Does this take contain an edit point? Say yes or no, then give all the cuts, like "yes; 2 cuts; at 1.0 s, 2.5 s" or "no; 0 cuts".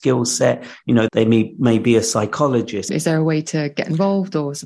yes; 2 cuts; at 1.1 s, 2.9 s